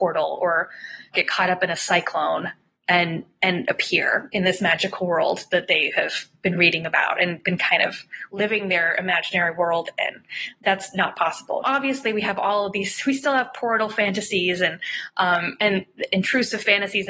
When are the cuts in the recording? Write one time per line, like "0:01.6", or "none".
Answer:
0:01.1
0:11.6